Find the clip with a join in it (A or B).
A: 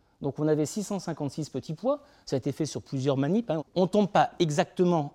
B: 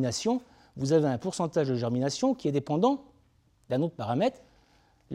A